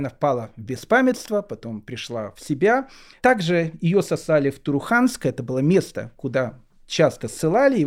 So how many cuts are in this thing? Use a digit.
0